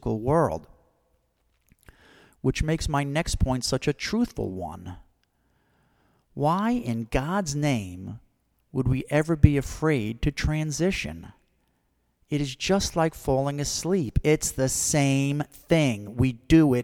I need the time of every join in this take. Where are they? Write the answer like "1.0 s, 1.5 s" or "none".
none